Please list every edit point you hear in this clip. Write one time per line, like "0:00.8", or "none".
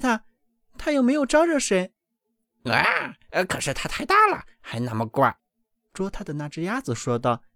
0:02.0
0:05.4